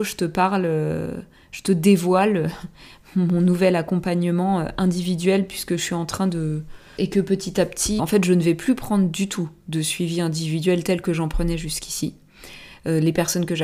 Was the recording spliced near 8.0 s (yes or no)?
yes